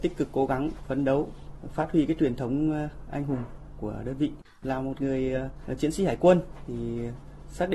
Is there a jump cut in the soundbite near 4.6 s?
yes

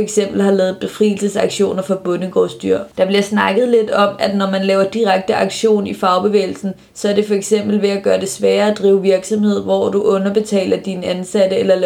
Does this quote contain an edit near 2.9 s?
yes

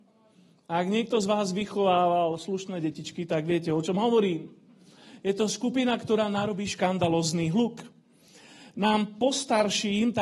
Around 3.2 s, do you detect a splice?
no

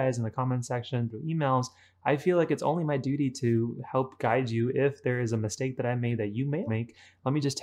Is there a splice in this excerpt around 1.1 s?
yes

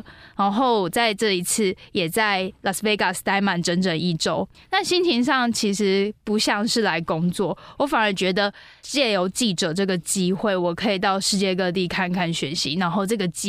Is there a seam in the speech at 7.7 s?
no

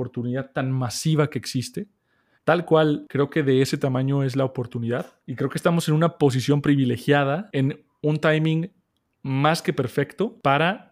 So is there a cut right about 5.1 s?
no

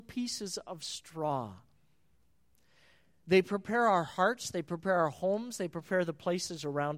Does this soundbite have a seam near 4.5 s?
no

